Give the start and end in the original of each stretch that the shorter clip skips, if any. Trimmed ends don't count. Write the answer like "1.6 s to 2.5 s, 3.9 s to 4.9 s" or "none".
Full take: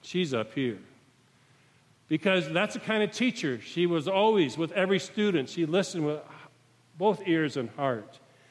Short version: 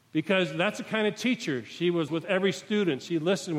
4.0 s to 4.5 s